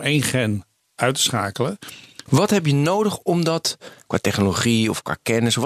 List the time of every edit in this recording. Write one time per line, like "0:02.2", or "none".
0:02.3